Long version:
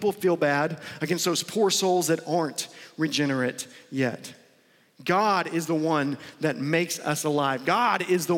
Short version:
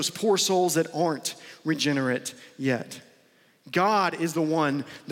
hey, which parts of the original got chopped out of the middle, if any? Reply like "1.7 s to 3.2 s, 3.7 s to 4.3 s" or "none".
none